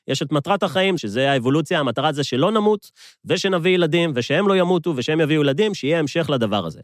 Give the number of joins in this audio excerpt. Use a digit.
1